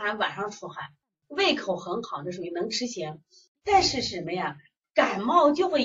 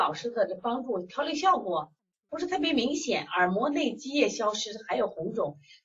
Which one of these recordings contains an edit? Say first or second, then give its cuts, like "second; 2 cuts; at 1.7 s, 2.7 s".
first; 2 cuts; at 1.1 s, 3.6 s